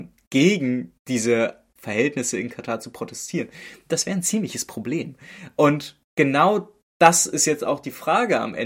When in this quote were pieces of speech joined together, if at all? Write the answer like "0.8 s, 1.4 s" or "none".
none